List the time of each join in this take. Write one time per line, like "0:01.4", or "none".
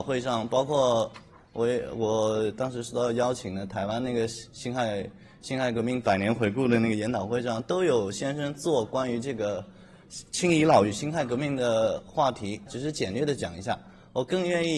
0:12.7